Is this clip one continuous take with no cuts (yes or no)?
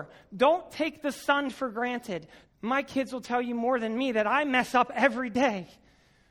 no